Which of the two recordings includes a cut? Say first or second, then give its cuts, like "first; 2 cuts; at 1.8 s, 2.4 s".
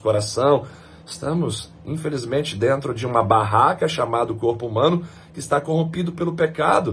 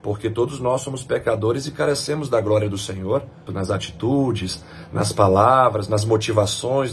second; 1 cut; at 3.5 s